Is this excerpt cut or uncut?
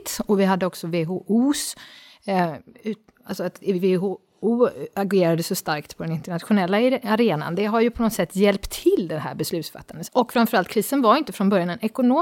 cut